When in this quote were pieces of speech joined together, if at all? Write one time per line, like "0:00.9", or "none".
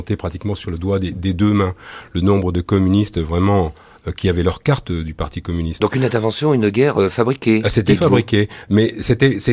none